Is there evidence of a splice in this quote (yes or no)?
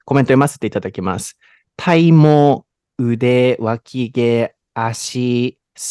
yes